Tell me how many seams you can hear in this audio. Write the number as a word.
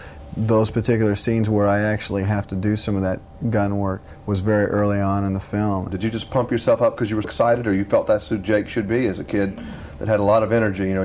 two